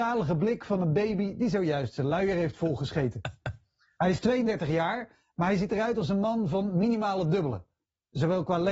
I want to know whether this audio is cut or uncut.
uncut